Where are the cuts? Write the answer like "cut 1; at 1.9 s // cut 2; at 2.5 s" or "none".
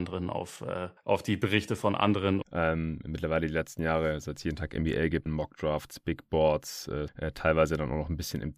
cut 1; at 2.4 s // cut 2; at 5.3 s // cut 3; at 7.1 s